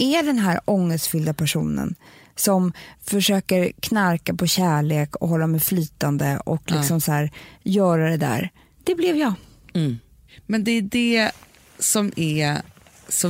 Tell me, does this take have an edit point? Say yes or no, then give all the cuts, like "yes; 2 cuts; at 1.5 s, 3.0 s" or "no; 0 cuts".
no; 0 cuts